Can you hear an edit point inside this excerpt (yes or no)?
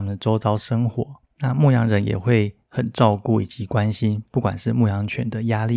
no